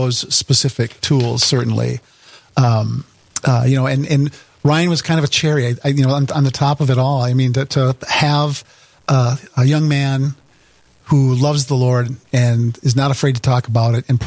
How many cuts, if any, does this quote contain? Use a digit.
0